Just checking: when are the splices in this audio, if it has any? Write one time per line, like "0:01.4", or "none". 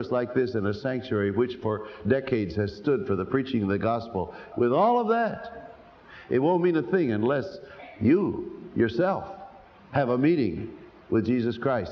0:04.5